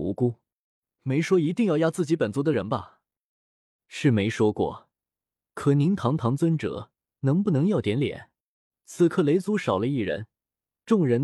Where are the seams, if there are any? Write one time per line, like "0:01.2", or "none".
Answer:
0:03.8
0:08.7